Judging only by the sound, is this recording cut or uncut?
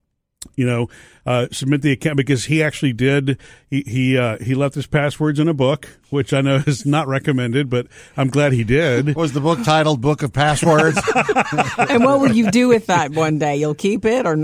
uncut